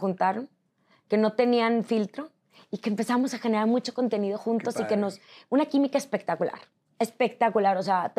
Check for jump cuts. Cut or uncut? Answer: uncut